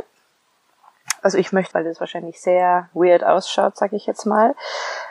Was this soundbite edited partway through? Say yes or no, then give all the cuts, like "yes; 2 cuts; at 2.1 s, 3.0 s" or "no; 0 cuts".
yes; 2 cuts; at 1.7 s, 2.9 s